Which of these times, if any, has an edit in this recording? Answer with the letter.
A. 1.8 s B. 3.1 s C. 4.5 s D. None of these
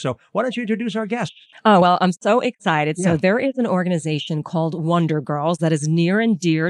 D